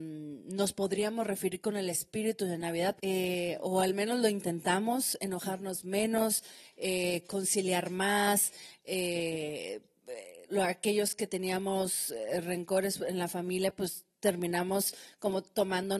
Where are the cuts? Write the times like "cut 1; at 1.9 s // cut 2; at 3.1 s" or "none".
cut 1; at 3.0 s // cut 2; at 10.5 s